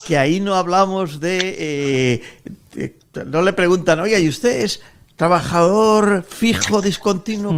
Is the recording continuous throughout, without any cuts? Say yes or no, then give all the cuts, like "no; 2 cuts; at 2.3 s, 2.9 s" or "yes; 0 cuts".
yes; 0 cuts